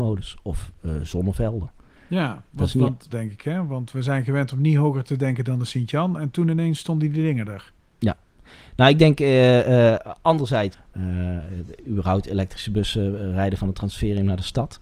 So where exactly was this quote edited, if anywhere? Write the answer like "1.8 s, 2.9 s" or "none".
3.1 s, 10.7 s